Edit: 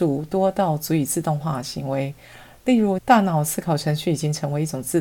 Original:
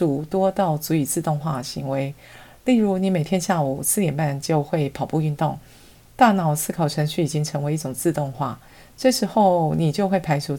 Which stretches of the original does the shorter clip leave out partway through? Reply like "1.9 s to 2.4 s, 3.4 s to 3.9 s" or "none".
3.0 s to 6.1 s